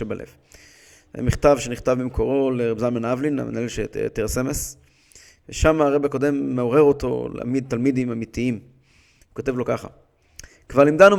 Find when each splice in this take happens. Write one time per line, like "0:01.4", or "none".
none